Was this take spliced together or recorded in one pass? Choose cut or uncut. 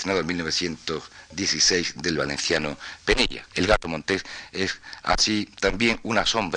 cut